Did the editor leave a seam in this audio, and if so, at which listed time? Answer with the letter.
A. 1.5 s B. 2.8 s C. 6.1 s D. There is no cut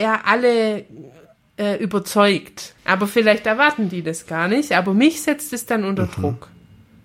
B